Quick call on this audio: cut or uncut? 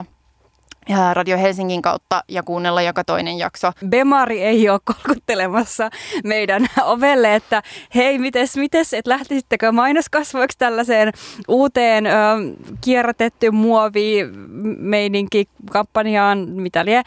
cut